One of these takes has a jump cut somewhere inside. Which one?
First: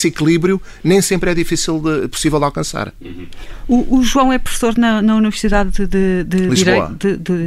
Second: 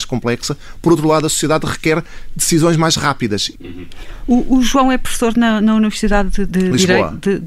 second; 2 cuts; at 3.5 s, 6.5 s

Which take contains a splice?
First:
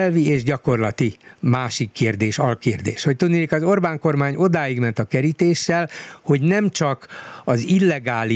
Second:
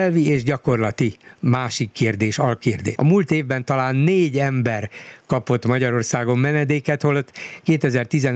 second; 1 cut; at 3.0 s

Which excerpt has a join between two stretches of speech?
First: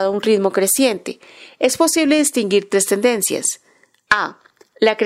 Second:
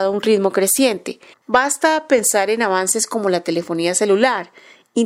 second; 1 cut; at 1.3 s

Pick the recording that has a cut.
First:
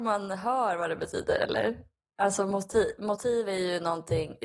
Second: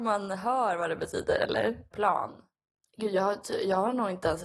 second; 1 cut; at 1.9 s

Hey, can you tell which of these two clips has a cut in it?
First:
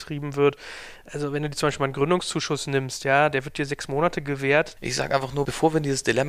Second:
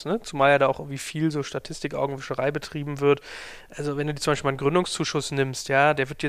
first; 1 cut; at 4.8 s

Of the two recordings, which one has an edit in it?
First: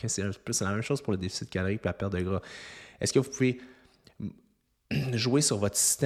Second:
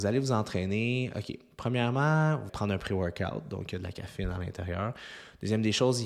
second; 1 cut; at 2.5 s

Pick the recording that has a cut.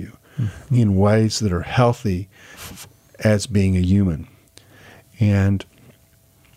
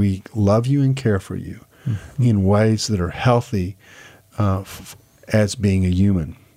first; 1 cut; at 2.5 s

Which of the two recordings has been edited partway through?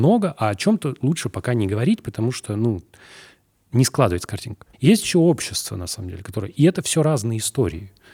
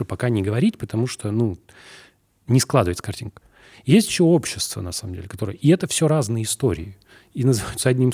first; 1 cut; at 4.7 s

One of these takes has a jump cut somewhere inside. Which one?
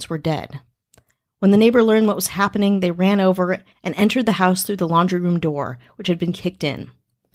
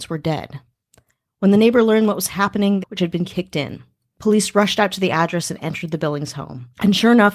second; 2 cuts; at 2.8 s, 4.1 s

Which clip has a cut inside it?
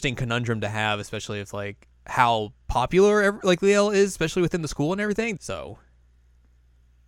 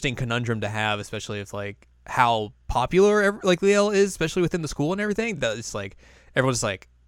first; 1 cut; at 5.4 s

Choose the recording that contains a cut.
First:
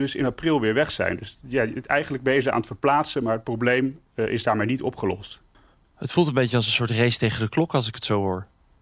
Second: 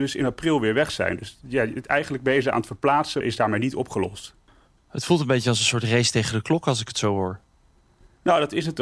second; 1 cut; at 3.2 s

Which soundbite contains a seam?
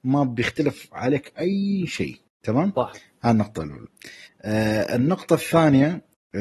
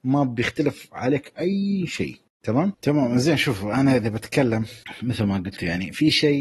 second; 1 cut; at 2.7 s

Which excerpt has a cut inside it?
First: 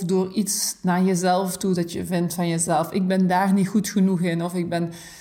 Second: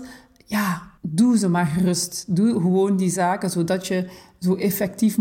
second; 1 cut; at 1.0 s

